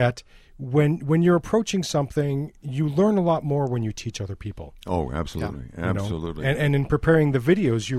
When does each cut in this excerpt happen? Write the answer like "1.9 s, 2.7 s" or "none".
none